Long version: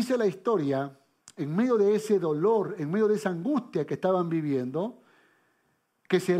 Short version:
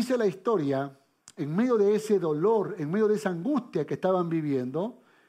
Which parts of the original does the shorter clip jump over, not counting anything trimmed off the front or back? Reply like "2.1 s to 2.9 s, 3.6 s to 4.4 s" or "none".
none